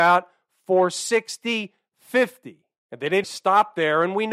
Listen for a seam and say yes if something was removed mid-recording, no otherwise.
yes